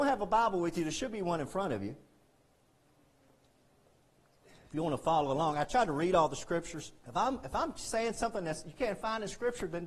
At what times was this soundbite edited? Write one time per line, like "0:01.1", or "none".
0:07.0